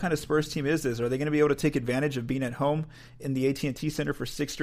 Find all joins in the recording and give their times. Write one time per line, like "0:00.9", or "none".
none

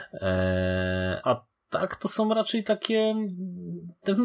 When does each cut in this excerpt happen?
0:01.2

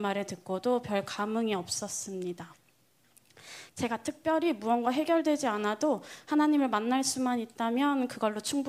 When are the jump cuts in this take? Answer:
0:03.7

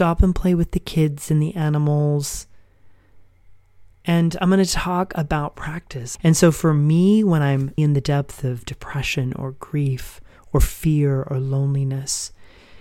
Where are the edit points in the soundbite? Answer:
0:06.2
0:07.8

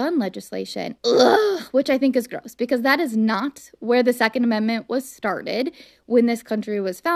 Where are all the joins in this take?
0:01.0

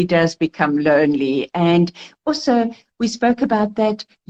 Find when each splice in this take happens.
none

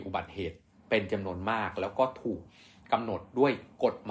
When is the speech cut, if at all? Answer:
none

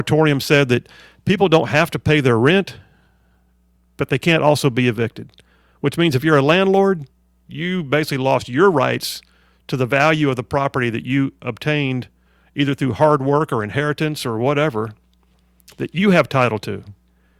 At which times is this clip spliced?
none

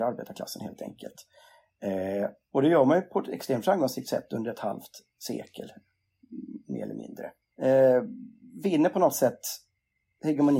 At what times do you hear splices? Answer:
0:07.5

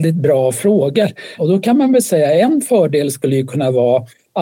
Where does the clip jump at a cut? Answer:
0:01.4

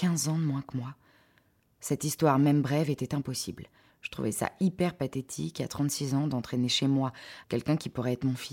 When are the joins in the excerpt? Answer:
0:03.9
0:07.4

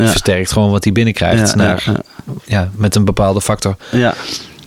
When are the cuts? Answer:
0:02.4

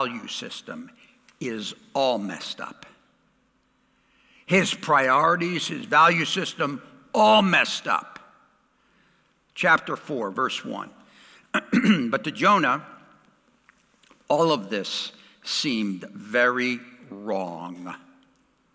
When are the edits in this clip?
none

